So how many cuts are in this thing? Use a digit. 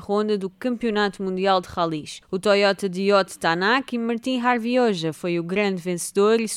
1